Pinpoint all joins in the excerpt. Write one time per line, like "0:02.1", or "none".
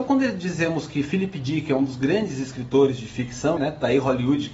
0:03.6